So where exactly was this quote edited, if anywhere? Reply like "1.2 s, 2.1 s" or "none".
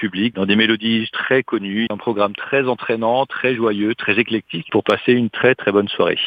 1.9 s